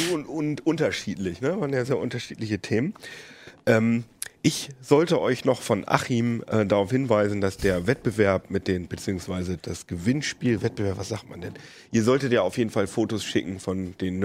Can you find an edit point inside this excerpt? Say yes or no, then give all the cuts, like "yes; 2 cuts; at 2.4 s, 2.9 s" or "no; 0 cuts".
no; 0 cuts